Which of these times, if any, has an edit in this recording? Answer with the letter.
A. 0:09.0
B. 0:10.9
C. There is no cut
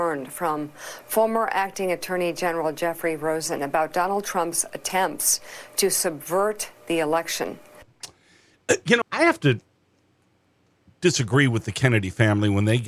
A